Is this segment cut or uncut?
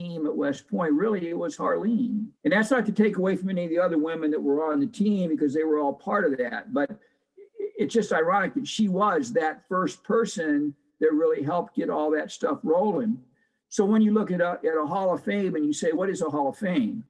cut